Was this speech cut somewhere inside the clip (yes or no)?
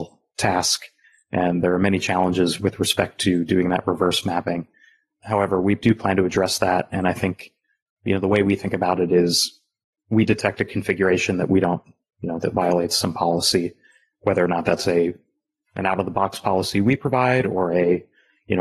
no